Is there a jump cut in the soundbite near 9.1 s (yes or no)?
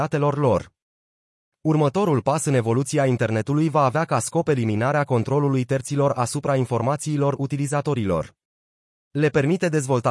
yes